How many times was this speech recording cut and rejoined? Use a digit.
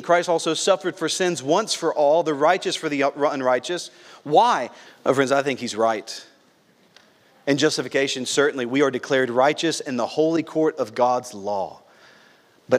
1